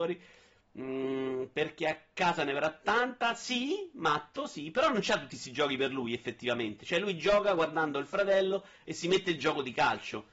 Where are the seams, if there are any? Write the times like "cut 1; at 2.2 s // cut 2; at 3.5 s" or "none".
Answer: none